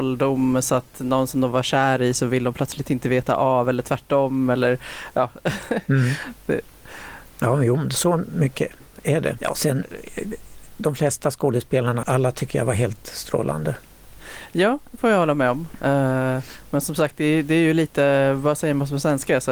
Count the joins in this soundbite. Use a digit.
2